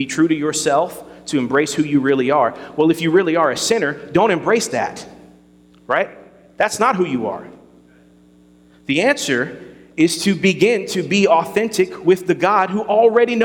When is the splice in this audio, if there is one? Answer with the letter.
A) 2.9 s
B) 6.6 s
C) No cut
C